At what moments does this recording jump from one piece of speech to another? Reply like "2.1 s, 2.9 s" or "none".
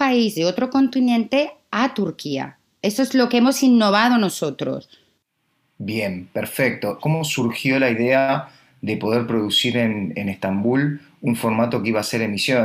7.0 s